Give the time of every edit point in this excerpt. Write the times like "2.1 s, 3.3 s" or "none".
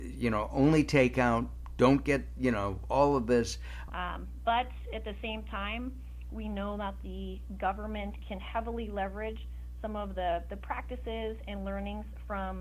3.9 s